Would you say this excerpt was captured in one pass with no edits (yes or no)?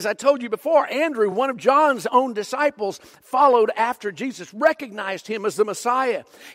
yes